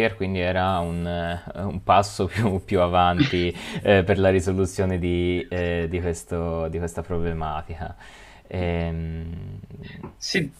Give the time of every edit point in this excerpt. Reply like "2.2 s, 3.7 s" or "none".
none